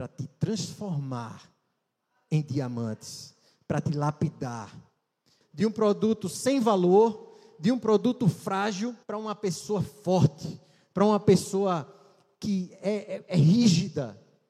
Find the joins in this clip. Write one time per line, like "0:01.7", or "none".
0:05.4
0:09.0